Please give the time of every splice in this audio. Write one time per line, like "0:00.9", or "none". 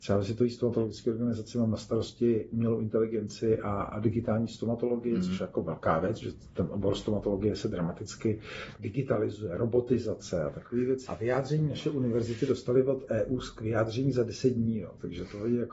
0:11.1